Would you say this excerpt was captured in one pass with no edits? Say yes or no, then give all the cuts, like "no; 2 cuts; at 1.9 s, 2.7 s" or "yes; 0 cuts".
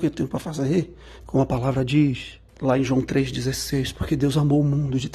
no; 2 cuts; at 1.2 s, 2.5 s